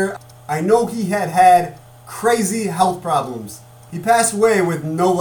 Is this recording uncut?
yes; 0 cuts

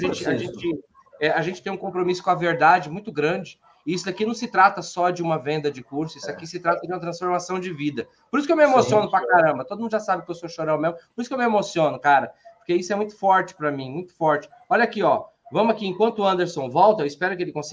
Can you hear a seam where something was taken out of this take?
no; 0 cuts

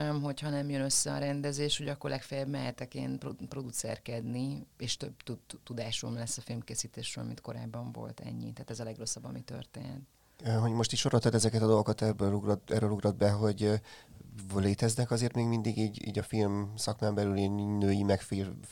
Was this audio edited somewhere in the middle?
no; 0 cuts

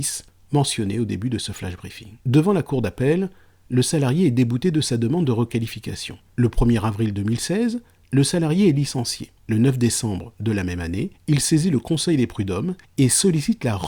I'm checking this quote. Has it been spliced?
yes; 3 cuts; at 2.2 s, 6.3 s, 9.4 s

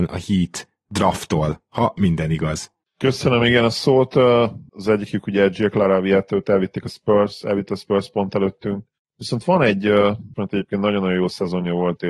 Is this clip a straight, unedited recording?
no; 3 cuts; at 4.7 s, 9.1 s, 10.3 s

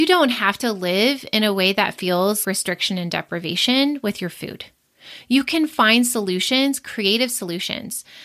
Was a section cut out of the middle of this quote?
yes; 1 cut; at 2.4 s

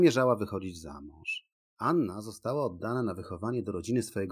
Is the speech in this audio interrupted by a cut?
yes; 1 cut; at 1.6 s

